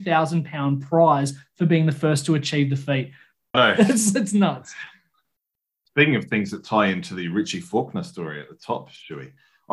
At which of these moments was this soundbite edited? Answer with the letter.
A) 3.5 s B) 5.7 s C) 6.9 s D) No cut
A